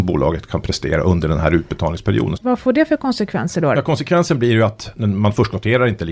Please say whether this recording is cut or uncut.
cut